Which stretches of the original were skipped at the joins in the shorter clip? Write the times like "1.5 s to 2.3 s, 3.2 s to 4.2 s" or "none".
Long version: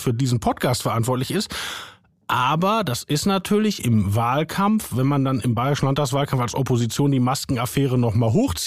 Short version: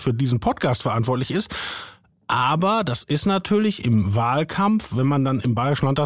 none